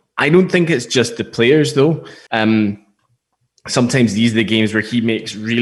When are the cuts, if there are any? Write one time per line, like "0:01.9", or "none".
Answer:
0:02.3

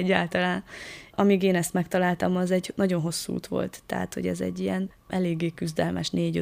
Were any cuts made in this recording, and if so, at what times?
none

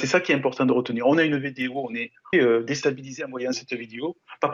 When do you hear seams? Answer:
0:02.3
0:03.5

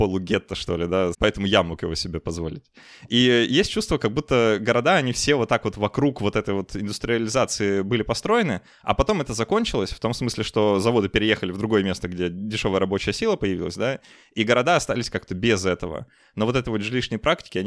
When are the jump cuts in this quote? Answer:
0:01.1

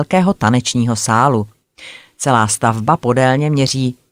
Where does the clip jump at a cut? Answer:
none

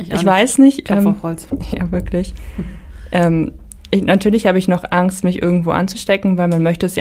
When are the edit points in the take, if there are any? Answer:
none

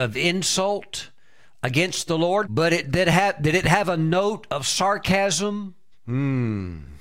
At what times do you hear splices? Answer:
0:02.4
0:05.9

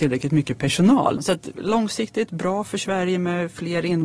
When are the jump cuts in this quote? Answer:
0:01.2

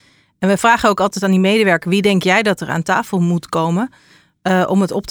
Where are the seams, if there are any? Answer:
none

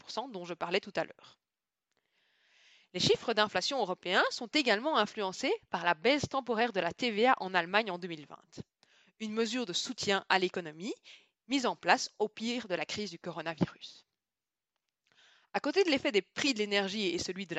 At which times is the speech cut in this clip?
none

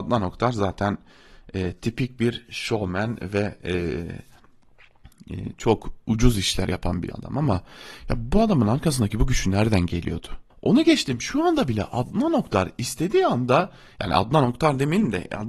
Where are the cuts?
0:10.5

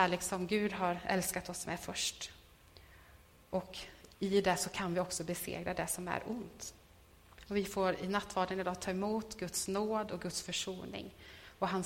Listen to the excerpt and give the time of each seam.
0:07.5

